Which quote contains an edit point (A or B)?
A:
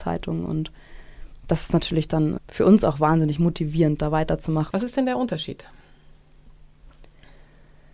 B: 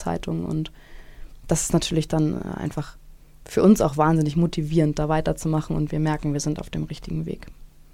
A